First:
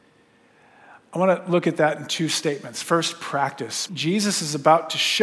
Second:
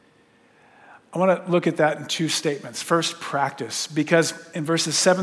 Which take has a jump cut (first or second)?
first